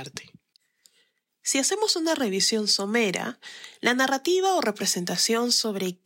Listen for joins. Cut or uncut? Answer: uncut